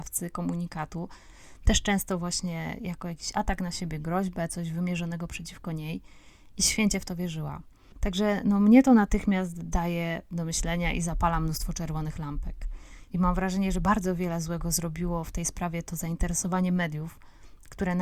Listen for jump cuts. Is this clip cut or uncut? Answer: cut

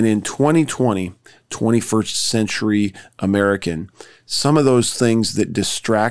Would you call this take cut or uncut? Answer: cut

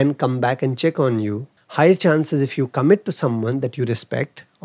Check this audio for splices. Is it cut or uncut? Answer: cut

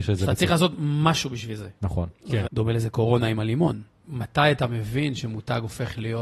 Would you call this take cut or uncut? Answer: cut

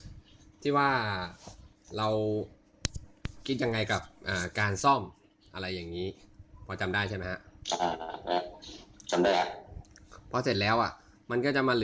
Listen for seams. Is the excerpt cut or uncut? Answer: uncut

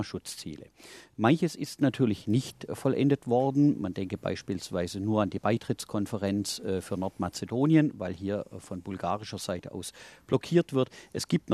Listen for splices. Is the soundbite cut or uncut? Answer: uncut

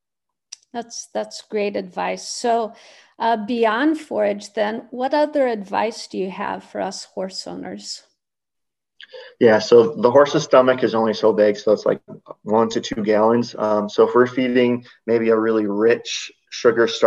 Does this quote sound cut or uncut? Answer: uncut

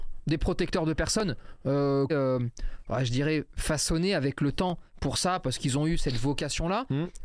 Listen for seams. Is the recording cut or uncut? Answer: cut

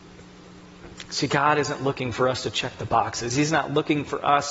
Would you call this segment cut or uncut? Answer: uncut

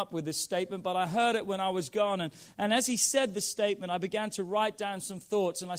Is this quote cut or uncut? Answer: uncut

